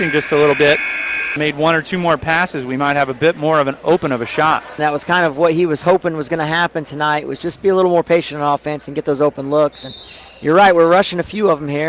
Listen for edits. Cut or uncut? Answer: cut